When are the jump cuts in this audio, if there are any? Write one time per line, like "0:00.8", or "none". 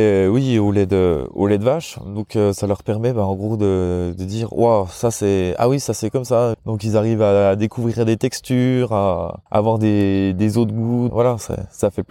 0:06.5
0:09.5
0:11.1